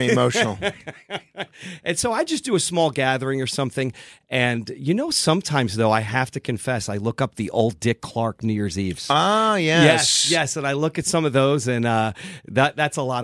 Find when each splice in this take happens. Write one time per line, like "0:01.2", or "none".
none